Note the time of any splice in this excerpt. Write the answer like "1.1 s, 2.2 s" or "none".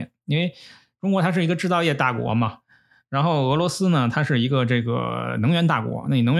none